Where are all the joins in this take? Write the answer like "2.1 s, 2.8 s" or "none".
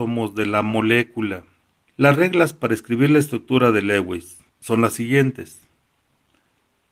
1.9 s, 4.5 s